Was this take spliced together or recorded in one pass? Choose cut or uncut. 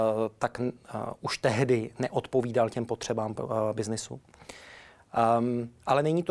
uncut